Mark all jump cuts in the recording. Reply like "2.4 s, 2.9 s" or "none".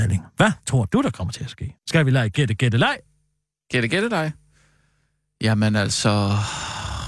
1.8 s